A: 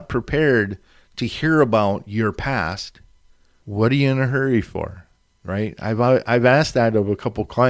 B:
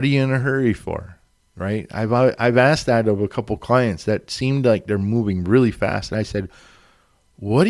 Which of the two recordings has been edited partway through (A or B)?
A